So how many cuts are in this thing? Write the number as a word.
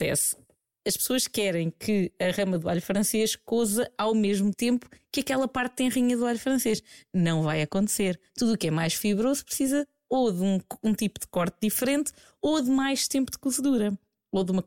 zero